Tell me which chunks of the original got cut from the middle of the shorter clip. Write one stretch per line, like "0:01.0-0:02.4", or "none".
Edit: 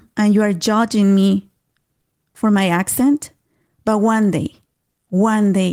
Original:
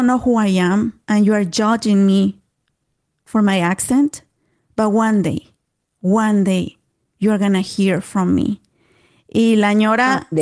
none